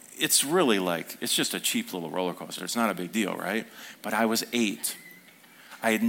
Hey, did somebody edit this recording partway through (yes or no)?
no